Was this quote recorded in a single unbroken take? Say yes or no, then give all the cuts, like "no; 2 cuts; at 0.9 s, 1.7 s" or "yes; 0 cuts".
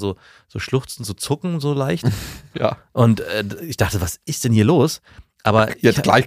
yes; 0 cuts